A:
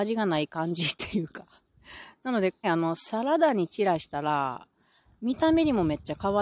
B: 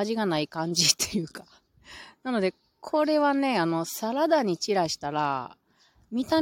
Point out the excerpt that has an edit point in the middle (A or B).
A